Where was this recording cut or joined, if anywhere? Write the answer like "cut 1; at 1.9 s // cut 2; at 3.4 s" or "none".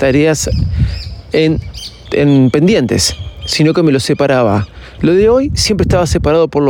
cut 1; at 2.1 s // cut 2; at 5.0 s